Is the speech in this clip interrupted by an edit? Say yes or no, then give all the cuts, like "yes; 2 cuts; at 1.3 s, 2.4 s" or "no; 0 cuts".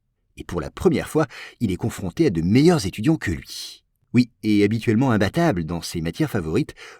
no; 0 cuts